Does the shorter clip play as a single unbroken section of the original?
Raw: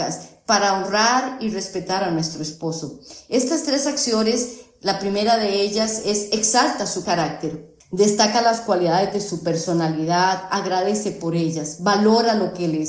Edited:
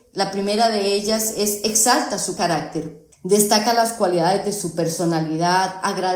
yes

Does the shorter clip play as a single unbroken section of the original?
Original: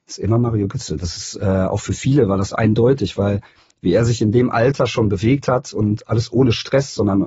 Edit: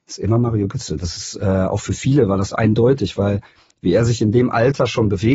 yes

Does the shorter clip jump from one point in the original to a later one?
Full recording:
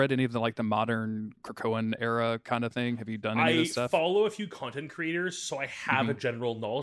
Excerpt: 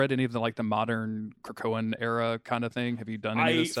no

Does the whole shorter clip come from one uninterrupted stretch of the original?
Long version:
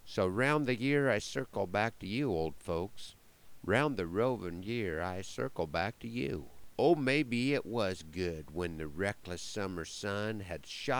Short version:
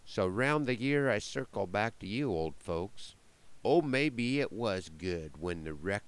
no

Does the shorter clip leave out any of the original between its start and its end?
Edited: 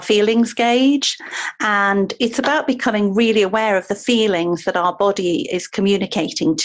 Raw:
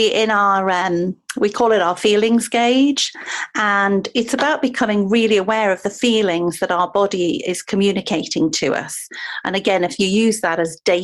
no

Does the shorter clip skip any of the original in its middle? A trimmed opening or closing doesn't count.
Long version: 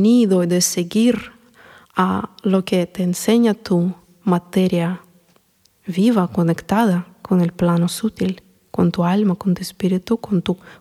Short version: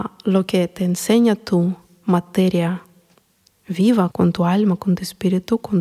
yes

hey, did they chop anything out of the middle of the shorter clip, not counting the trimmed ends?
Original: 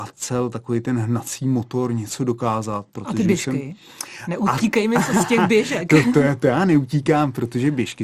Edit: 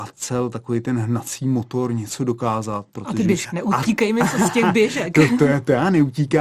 yes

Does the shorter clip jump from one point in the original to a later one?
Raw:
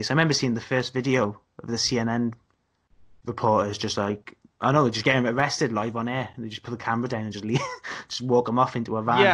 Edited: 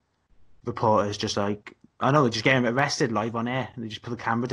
no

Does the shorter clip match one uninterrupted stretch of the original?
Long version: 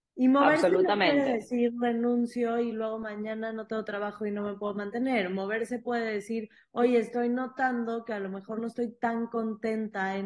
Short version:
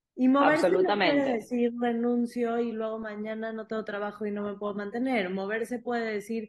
yes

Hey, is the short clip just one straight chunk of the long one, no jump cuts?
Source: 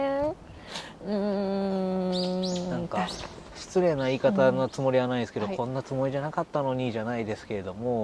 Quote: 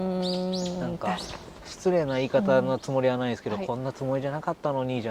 yes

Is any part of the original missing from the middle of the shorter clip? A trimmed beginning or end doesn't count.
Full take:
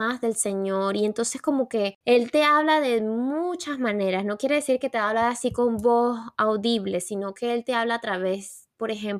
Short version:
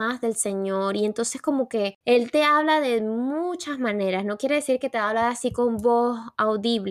no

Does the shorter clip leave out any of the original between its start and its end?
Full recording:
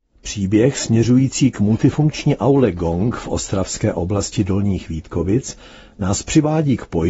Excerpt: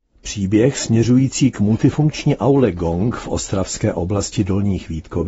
no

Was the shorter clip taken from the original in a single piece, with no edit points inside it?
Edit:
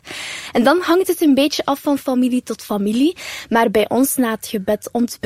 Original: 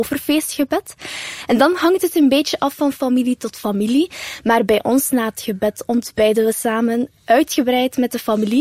yes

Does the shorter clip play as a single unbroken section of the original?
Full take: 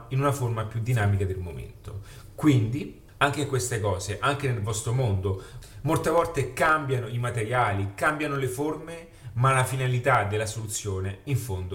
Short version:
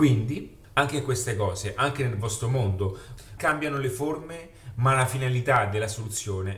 no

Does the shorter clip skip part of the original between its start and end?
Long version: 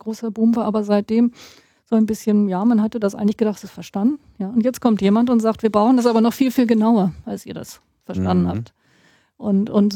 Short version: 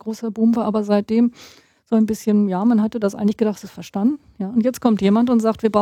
no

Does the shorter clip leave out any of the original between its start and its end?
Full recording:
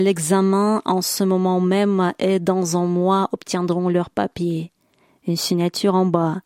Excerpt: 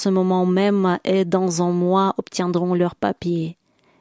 no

